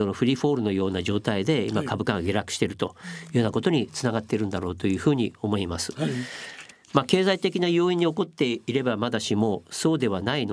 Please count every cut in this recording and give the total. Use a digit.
0